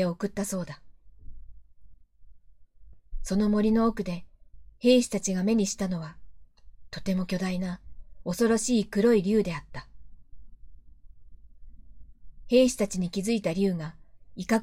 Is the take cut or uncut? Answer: uncut